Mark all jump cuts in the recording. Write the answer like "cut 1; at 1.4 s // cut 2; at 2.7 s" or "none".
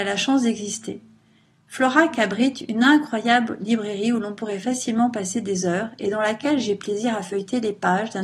none